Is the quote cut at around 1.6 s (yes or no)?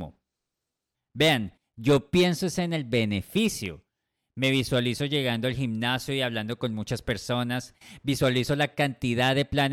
yes